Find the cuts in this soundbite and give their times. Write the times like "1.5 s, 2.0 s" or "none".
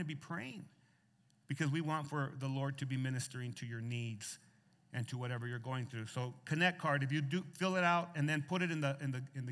none